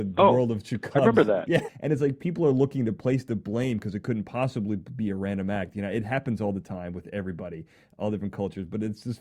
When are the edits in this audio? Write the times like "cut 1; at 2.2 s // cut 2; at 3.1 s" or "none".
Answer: cut 1; at 1.7 s